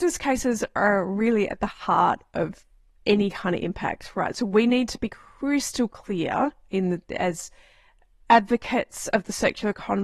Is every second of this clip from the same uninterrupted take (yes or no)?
yes